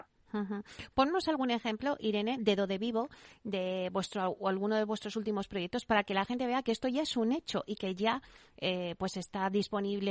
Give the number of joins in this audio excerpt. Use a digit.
0